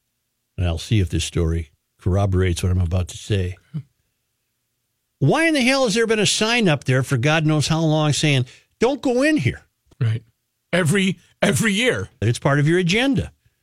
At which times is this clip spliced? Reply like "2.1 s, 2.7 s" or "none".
9.9 s, 12.2 s